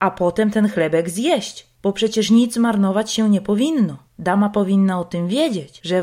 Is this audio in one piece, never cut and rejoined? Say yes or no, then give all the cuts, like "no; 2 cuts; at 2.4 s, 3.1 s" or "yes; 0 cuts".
yes; 0 cuts